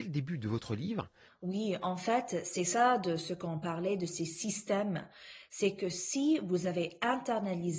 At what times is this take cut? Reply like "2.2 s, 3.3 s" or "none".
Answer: 1.2 s